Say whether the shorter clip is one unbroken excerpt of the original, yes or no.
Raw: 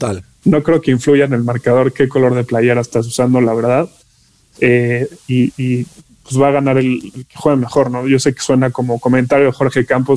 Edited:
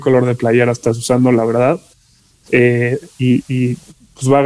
yes